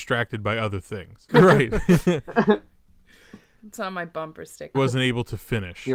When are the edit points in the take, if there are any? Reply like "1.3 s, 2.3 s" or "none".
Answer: 1.3 s, 4.7 s